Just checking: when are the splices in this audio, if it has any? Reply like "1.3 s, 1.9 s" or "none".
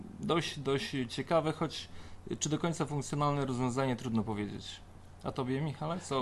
none